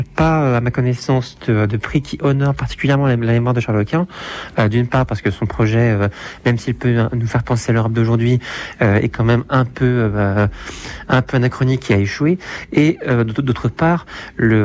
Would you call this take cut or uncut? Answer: uncut